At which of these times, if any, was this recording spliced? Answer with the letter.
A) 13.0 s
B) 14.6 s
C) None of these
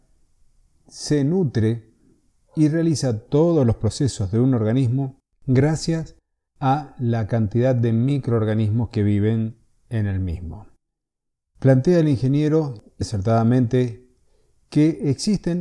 A